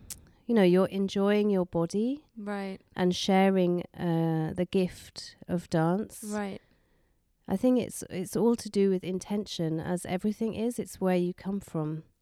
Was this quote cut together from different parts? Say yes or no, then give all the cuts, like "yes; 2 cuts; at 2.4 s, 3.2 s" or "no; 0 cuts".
no; 0 cuts